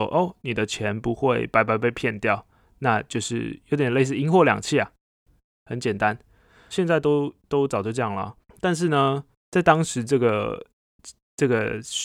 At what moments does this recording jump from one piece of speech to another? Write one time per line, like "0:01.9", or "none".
0:06.7